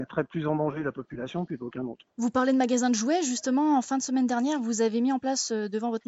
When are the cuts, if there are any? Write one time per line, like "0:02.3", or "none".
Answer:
0:02.1